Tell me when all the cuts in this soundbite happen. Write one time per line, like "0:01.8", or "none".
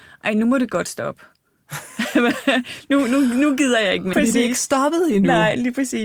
0:04.1